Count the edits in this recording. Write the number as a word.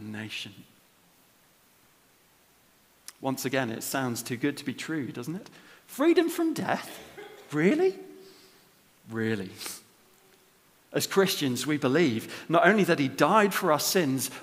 zero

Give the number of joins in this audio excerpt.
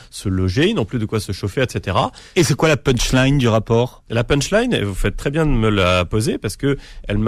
one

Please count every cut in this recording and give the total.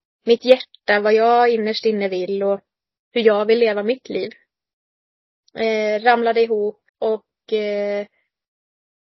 two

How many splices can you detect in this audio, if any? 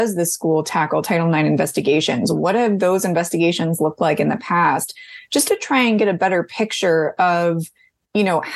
zero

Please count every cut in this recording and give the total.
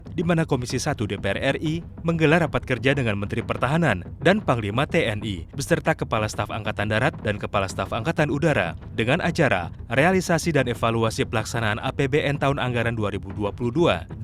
one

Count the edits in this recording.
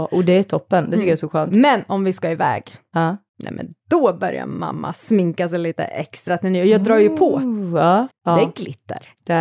one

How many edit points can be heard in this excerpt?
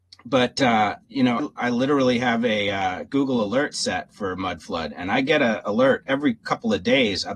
one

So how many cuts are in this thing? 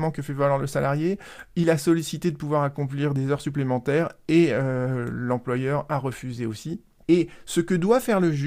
one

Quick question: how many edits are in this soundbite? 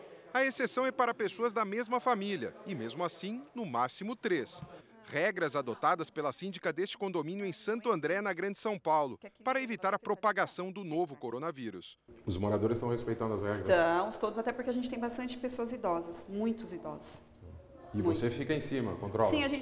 zero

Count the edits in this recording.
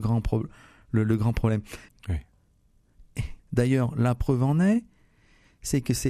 two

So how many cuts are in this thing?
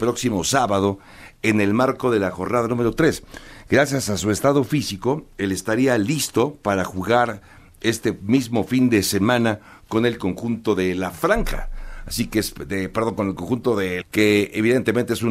one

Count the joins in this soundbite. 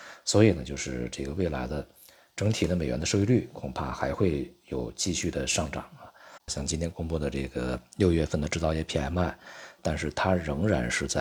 two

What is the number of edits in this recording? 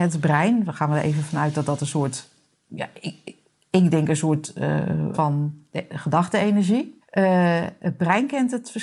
two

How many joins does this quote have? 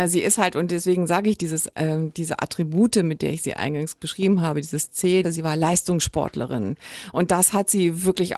one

